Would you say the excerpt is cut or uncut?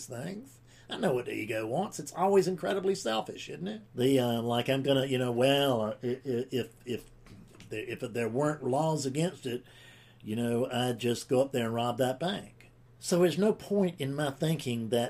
cut